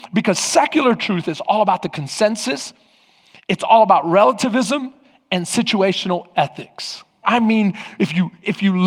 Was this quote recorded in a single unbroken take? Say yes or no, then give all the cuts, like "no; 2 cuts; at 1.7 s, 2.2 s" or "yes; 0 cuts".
no; 1 cut; at 7.2 s